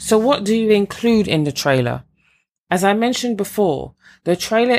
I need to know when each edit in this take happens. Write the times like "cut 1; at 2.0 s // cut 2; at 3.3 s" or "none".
none